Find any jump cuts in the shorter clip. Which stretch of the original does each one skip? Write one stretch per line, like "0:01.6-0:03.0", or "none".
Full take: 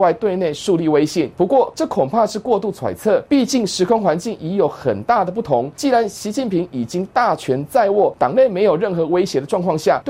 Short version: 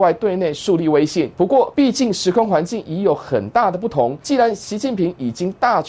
0:01.7-0:03.3